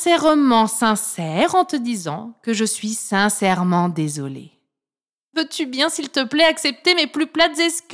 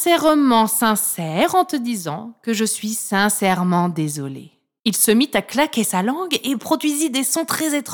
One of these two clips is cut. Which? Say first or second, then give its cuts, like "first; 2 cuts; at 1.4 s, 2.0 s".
second; 1 cut; at 4.8 s